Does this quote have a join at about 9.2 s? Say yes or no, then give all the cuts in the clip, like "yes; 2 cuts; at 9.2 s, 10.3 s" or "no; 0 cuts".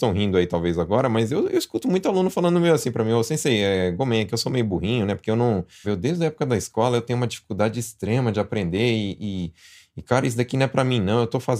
no; 1 cut; at 5.8 s